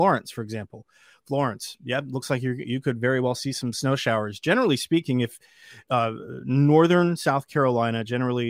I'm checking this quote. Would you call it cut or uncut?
uncut